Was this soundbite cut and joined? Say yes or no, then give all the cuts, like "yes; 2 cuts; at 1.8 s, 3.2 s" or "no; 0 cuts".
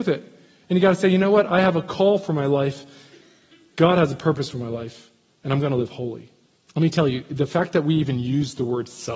yes; 1 cut; at 6.6 s